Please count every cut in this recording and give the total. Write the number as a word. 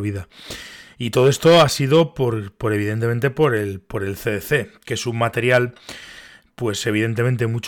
zero